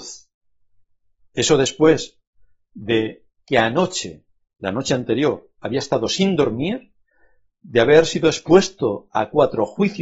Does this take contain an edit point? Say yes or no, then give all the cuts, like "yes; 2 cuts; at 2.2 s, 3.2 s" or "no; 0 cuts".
no; 0 cuts